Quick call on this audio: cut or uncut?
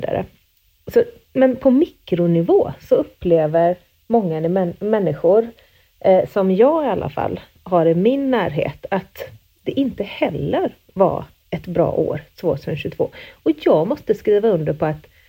uncut